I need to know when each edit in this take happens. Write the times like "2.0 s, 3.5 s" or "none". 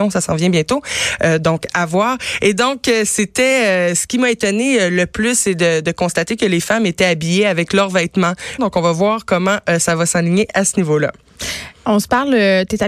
8.6 s